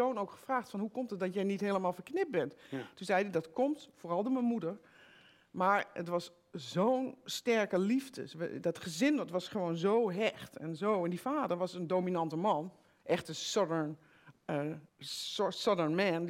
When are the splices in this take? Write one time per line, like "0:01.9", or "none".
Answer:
0:14.9